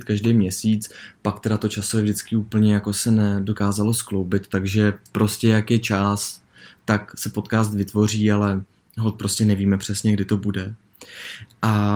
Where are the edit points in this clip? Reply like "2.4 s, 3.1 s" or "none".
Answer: none